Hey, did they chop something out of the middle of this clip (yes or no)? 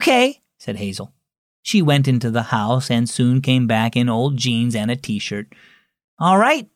no